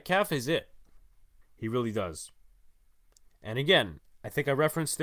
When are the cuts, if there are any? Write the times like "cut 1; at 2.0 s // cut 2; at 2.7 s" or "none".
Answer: cut 1; at 1.4 s